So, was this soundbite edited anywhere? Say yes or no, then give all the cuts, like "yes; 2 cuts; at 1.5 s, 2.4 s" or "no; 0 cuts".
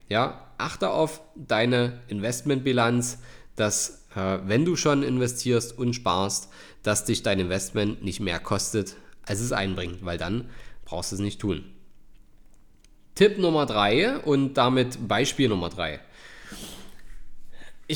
no; 0 cuts